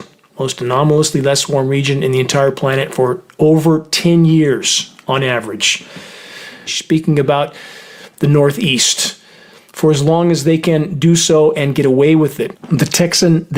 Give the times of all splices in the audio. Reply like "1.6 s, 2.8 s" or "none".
6.7 s, 12.5 s